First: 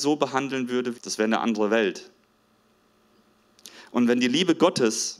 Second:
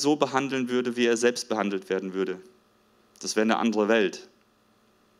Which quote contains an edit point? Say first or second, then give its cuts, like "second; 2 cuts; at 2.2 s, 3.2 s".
first; 1 cut; at 0.9 s